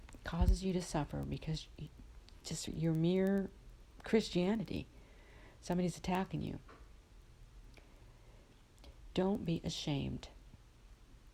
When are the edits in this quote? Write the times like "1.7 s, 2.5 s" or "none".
2.7 s